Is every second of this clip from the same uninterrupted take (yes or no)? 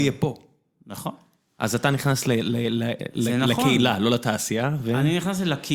yes